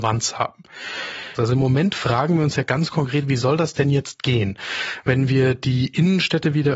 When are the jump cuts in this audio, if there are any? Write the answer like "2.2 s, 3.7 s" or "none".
1.4 s